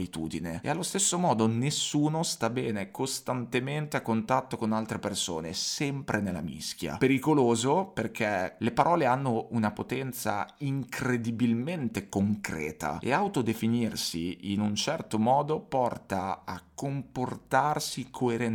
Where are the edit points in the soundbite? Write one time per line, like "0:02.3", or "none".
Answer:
0:08.6

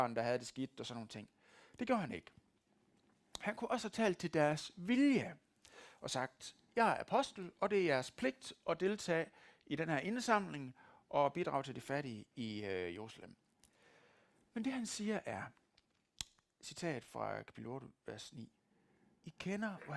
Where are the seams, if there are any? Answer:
none

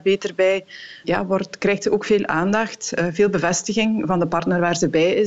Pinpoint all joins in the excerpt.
0:01.0

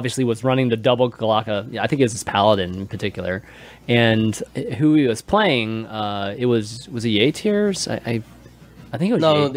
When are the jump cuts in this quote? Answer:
0:04.5

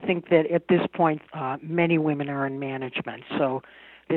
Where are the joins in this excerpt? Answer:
0:01.3

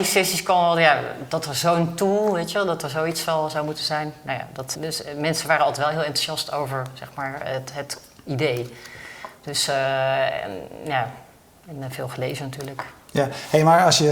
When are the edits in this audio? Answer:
0:04.7

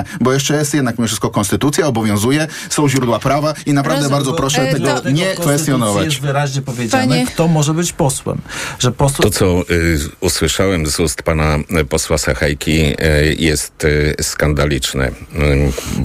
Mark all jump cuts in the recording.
0:09.2

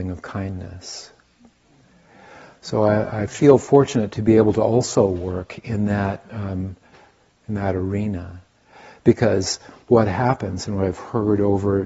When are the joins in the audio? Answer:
0:07.3

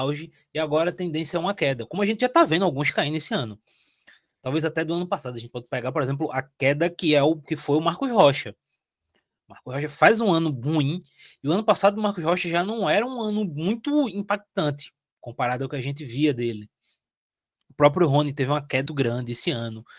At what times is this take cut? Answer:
0:18.9

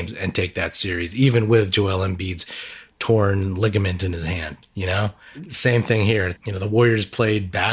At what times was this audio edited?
0:06.4

